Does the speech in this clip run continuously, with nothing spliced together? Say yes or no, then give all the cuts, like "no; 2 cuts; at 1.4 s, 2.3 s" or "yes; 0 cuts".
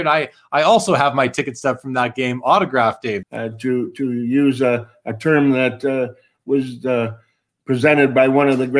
no; 1 cut; at 3.2 s